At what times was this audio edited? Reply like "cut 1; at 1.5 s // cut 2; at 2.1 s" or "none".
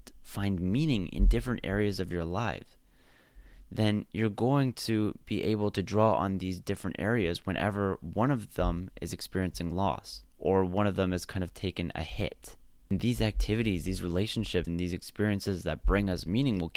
cut 1; at 10.3 s // cut 2; at 14.6 s